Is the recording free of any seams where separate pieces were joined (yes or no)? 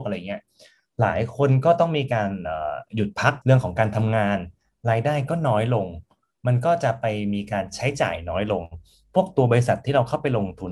no